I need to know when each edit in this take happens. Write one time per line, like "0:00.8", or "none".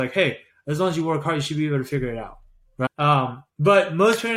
0:02.9